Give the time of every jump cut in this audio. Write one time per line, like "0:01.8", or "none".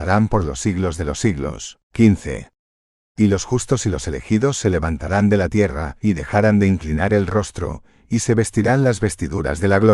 0:01.8